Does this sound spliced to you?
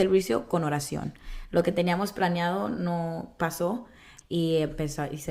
yes; 1 cut; at 4.2 s

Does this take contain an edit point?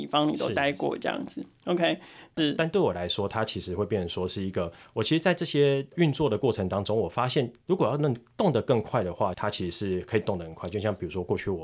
yes; 2 cuts; at 2.4 s, 9.3 s

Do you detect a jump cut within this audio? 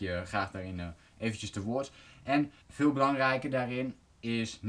yes; 1 cut; at 2.6 s

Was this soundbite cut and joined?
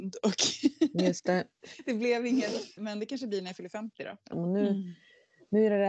yes; 2 cuts; at 2.8 s, 4.3 s

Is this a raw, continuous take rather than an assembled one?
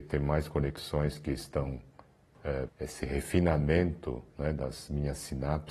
no; 1 cut; at 2.7 s

